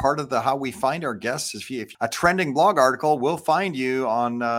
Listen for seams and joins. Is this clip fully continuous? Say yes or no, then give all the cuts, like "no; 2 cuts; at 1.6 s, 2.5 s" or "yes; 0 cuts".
no; 1 cut; at 1.9 s